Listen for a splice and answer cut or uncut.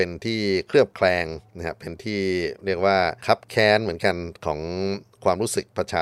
cut